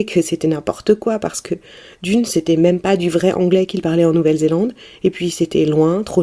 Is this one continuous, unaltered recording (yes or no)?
yes